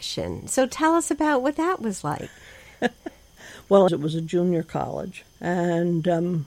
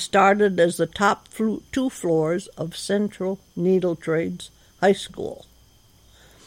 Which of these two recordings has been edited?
first; 2 cuts; at 3.9 s, 5.2 s

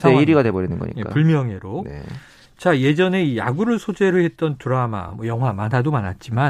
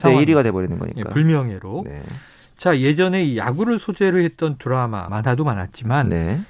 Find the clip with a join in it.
second; 1 cut; at 5.1 s

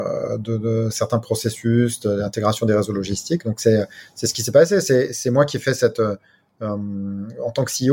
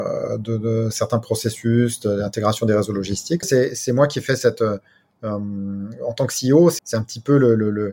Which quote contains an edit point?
second; 2 cuts; at 3.4 s, 6.8 s

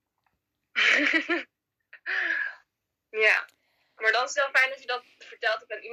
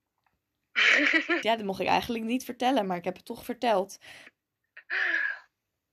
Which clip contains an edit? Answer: second; 2 cuts; at 1.4 s, 4.3 s

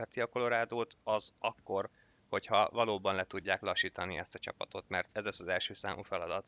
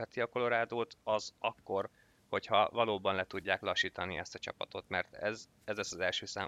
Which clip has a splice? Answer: first; 1 cut; at 5.1 s

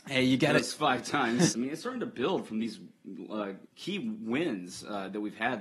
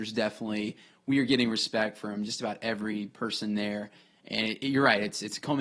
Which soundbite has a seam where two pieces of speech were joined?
first; 2 cuts; at 1.5 s, 3.7 s

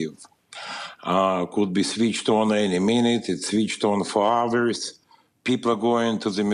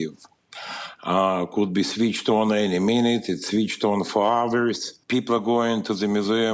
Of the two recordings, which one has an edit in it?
second; 1 cut; at 5.0 s

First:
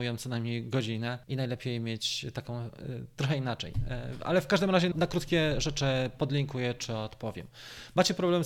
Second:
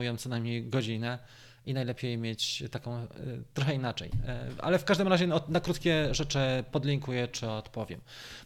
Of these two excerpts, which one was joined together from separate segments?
first; 2 cuts; at 1.2 s, 4.9 s

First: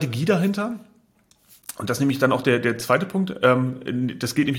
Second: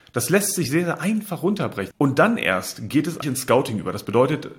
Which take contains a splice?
second; 2 cuts; at 1.9 s, 3.2 s

